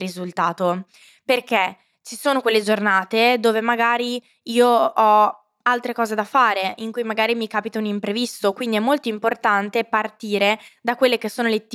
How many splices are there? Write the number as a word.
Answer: zero